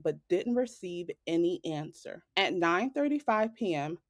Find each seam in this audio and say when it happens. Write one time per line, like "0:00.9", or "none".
0:02.3